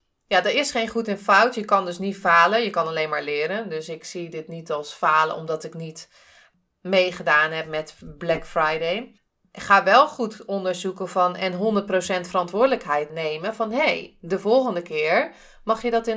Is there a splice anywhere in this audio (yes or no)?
yes